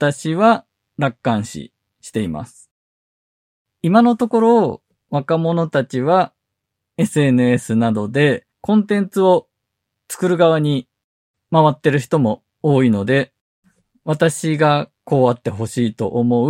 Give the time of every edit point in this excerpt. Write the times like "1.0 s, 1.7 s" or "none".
8.5 s, 15.0 s

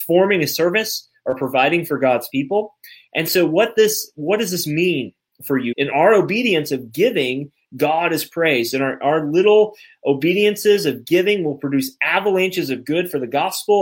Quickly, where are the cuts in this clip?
5.7 s

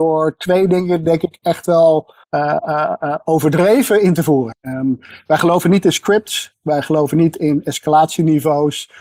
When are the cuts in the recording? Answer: 2.2 s, 4.5 s

